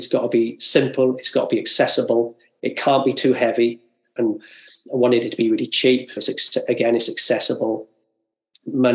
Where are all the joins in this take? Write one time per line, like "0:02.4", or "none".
0:04.2
0:06.2

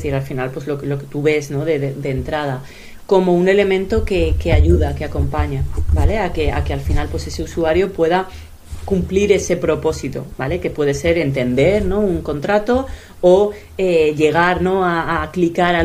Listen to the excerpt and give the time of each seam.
none

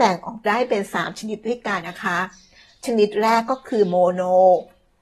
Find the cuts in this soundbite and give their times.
0:01.8

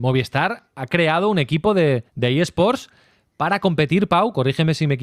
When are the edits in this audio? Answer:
0:02.1

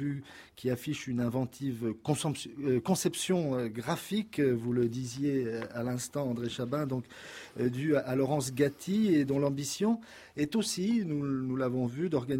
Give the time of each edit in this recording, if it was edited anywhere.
none

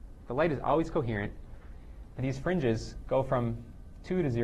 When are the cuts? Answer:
0:02.2

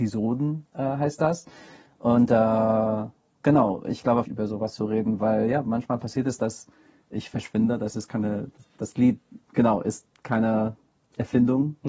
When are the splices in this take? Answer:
0:04.3

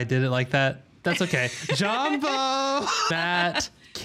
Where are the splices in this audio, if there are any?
0:03.1

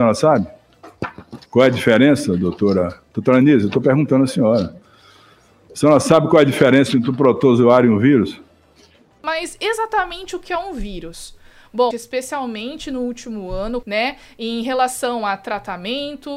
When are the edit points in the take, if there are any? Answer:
0:01.5
0:11.9
0:13.8

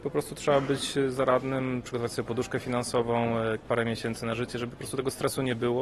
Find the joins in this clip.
none

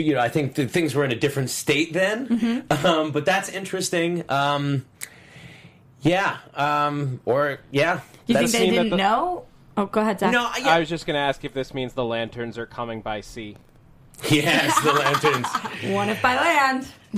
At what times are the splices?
none

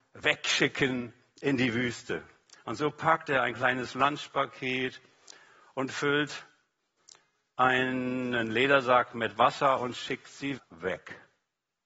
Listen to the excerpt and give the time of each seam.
0:10.6

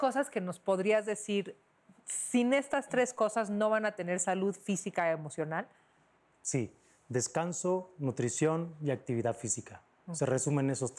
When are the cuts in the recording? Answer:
none

